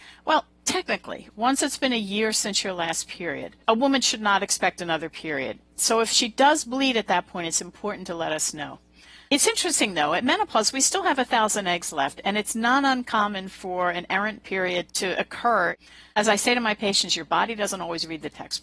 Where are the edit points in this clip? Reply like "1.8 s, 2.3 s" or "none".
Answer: 3.6 s